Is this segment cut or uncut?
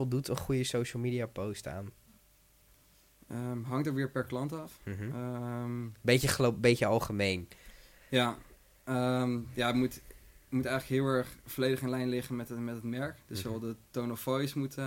uncut